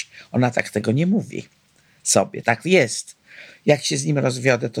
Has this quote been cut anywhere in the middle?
yes; 1 cut; at 2.4 s

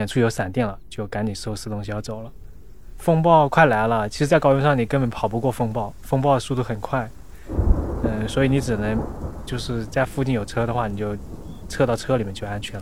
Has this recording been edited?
no; 0 cuts

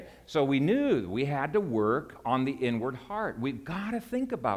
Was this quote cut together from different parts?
no; 0 cuts

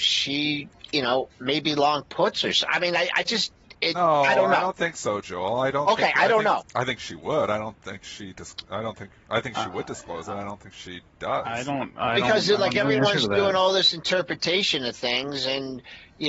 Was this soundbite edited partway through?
yes; 1 cut; at 6.6 s

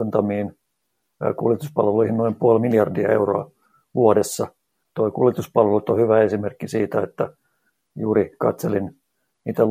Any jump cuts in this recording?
yes; 1 cut; at 4.8 s

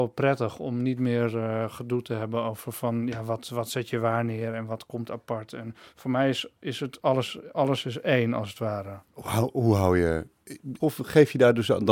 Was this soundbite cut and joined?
yes; 2 cuts; at 9.0 s, 10.8 s

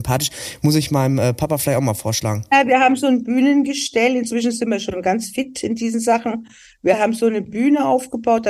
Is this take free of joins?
yes; 0 cuts

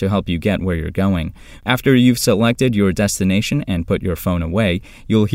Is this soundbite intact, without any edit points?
no; 1 cut; at 1.6 s

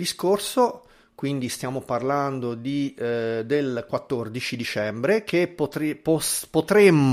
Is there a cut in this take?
no; 0 cuts

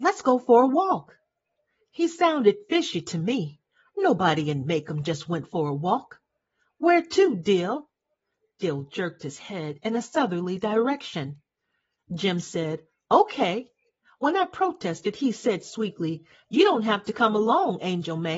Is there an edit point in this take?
no; 0 cuts

